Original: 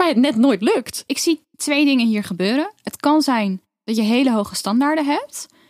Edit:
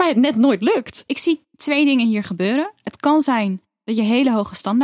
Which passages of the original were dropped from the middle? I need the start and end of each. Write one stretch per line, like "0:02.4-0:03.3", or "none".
none

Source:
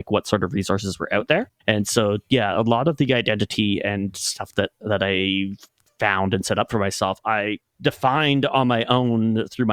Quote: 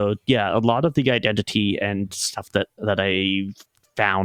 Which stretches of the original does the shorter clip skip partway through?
none

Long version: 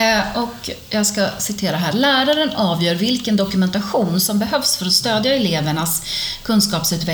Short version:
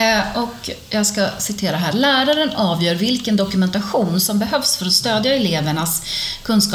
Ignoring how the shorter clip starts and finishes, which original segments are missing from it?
none

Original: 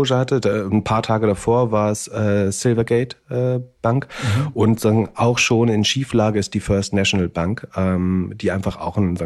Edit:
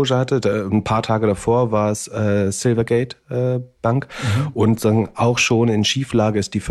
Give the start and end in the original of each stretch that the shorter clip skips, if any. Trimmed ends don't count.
none

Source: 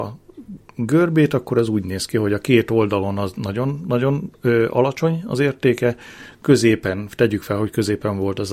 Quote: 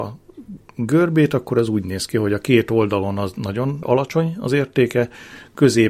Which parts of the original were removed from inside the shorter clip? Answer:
0:03.8-0:04.7

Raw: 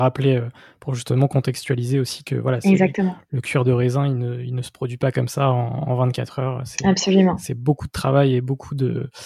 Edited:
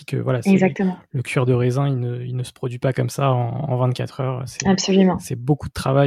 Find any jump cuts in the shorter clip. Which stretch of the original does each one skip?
none

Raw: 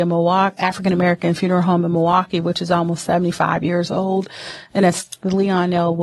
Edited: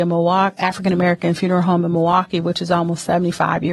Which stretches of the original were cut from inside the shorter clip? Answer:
none

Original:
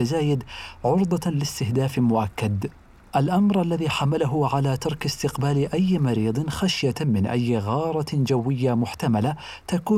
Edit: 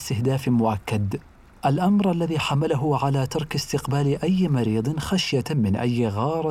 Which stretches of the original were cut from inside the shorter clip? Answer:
none

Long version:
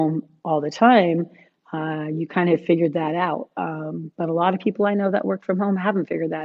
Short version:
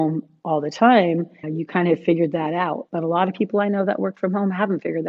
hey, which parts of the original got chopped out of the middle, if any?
0:01.4-0:02.0
0:03.5-0:04.1

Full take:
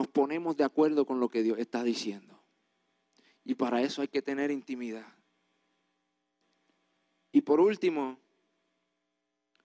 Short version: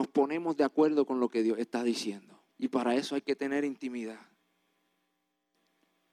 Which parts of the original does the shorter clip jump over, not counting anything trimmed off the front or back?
0:02.5-0:03.4

